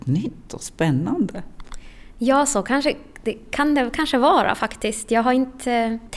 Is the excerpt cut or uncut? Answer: uncut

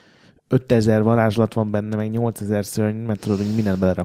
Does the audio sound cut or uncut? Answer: uncut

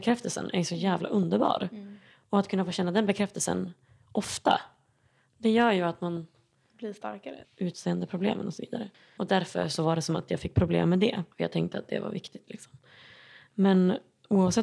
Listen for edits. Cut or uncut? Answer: cut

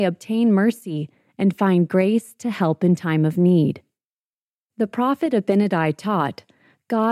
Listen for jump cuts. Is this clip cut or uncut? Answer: uncut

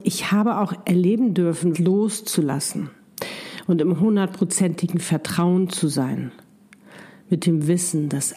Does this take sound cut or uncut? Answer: cut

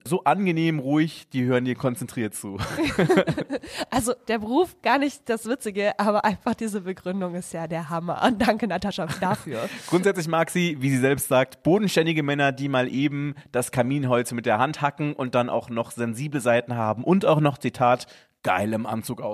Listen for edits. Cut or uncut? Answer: uncut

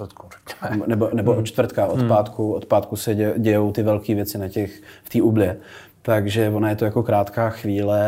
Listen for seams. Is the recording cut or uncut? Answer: cut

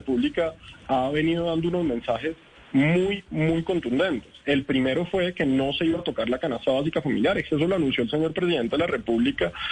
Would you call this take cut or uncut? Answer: uncut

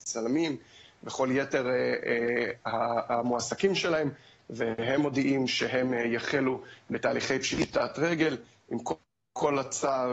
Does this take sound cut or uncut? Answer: uncut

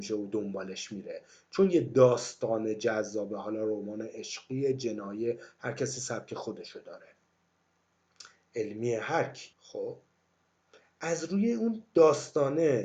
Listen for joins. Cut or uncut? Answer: cut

